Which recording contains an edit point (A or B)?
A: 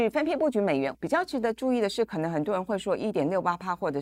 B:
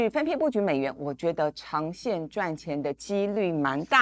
A